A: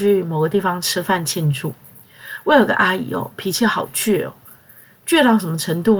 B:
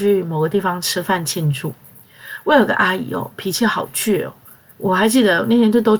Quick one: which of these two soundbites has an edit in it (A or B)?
B